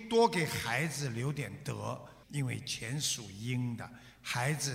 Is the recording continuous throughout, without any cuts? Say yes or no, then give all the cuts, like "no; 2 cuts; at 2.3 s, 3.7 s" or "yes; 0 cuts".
no; 1 cut; at 2.2 s